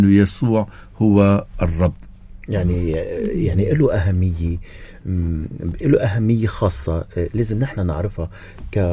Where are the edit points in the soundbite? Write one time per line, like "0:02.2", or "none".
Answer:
none